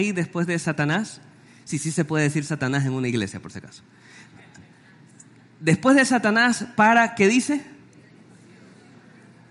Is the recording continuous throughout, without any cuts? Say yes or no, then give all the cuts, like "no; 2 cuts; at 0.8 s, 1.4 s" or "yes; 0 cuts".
yes; 0 cuts